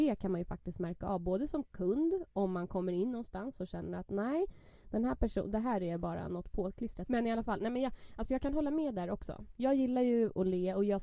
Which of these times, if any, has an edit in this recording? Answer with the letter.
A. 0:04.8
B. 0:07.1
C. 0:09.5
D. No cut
B